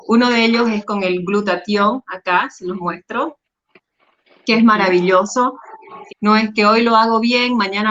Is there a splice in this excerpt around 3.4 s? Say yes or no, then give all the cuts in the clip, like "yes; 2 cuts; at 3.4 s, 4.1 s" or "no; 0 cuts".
no; 1 cut; at 6.1 s